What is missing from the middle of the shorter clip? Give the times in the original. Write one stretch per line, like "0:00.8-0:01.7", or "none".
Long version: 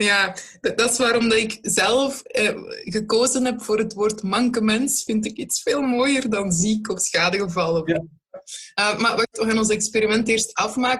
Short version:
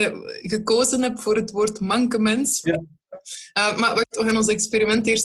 0:05.1-0:07.9